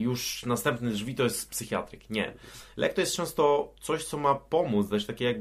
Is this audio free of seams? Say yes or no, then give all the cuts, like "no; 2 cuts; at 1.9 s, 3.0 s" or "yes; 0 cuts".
yes; 0 cuts